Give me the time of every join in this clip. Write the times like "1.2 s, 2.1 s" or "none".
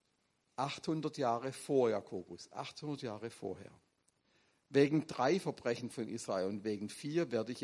none